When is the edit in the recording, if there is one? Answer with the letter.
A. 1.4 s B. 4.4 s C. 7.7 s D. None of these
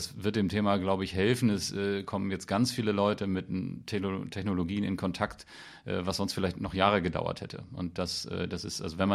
D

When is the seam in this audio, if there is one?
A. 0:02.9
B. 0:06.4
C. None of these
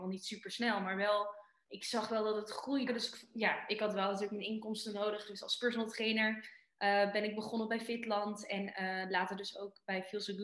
A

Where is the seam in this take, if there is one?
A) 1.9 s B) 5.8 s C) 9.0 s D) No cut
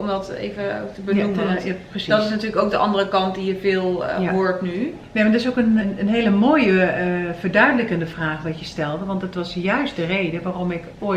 B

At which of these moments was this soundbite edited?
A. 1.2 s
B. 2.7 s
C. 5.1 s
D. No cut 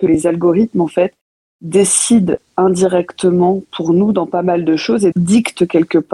C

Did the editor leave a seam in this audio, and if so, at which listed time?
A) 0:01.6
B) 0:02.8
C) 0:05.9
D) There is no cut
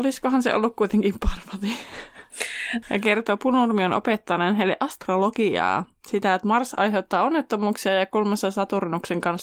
B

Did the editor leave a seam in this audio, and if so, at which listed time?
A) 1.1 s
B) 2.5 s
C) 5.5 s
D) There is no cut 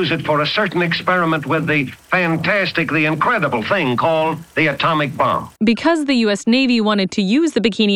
C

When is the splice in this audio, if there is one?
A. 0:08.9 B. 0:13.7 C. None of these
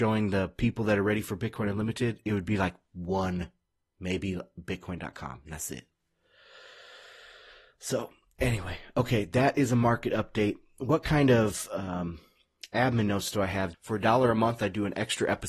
B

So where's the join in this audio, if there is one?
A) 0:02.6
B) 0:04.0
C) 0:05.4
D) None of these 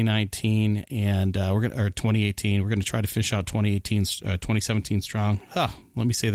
D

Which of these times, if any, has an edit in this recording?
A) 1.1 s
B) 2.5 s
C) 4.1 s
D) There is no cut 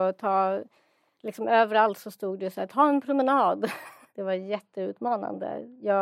C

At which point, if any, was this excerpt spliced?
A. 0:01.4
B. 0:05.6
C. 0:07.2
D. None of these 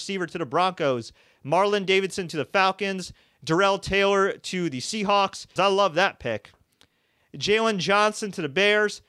B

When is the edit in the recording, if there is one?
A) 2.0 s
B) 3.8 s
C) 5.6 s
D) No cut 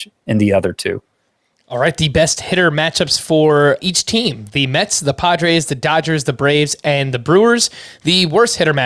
B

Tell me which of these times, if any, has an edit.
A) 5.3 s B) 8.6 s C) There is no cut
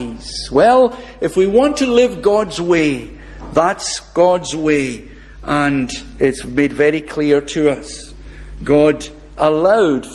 C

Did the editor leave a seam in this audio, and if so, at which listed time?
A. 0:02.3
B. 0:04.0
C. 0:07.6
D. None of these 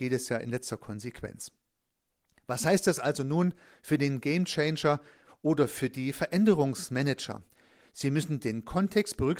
D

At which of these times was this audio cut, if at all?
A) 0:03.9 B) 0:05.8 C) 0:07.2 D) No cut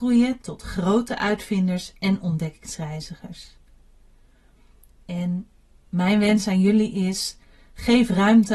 D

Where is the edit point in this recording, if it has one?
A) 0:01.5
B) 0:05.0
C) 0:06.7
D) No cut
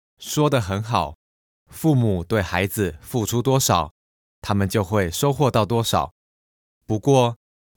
C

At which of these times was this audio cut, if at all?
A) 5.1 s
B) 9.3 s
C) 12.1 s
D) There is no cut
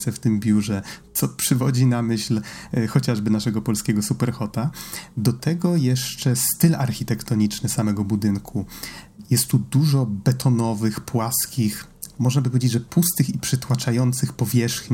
D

